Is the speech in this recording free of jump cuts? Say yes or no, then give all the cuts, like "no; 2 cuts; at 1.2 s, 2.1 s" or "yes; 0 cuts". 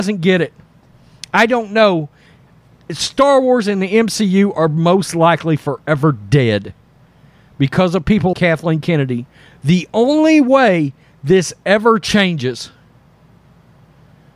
no; 1 cut; at 8.3 s